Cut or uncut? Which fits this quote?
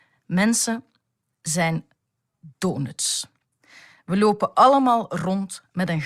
uncut